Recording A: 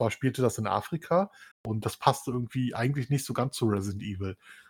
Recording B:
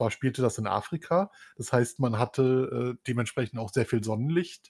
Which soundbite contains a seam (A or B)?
A